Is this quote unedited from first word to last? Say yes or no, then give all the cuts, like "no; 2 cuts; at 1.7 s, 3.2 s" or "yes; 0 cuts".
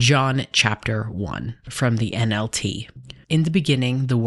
no; 1 cut; at 3.2 s